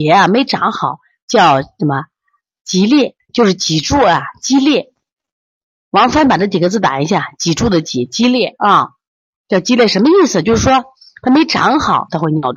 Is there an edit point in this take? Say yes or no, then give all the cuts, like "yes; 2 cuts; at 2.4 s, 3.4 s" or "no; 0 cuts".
no; 0 cuts